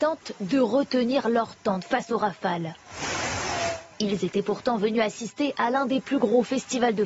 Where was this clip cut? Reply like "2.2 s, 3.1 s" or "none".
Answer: none